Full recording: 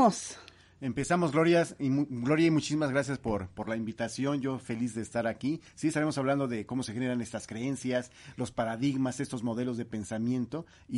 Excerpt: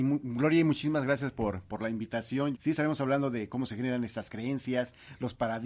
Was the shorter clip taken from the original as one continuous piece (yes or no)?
no